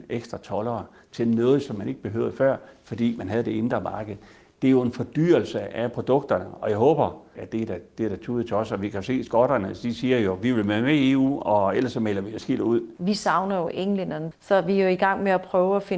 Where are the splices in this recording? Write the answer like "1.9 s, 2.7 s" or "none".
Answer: 7.4 s, 14.3 s